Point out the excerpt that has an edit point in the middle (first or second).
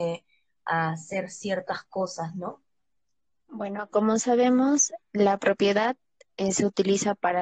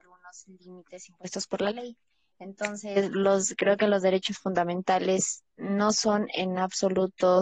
first